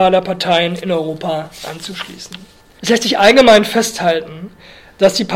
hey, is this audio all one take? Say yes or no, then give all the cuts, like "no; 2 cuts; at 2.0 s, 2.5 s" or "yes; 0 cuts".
no; 1 cut; at 2.8 s